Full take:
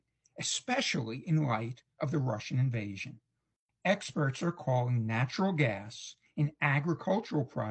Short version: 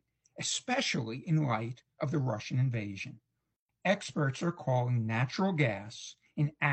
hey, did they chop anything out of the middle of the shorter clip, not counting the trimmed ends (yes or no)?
no